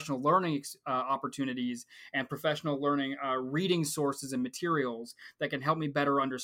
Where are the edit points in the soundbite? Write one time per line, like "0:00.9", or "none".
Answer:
none